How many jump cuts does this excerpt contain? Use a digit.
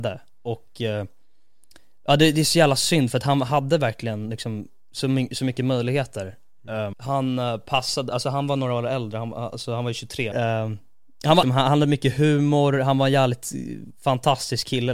3